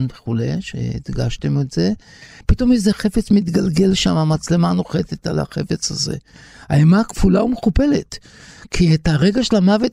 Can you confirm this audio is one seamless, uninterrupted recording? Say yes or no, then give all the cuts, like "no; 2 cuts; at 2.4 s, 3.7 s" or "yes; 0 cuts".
no; 1 cut; at 2.4 s